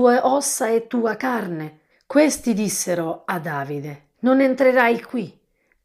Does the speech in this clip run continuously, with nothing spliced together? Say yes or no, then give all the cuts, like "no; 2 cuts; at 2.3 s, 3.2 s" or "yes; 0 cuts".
no; 2 cuts; at 1.9 s, 4.1 s